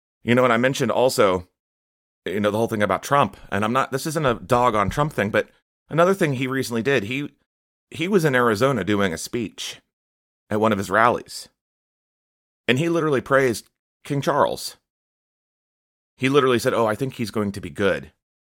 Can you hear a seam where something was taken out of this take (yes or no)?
no